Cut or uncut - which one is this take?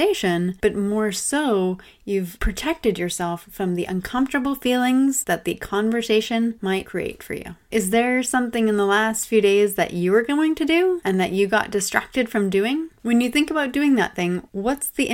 uncut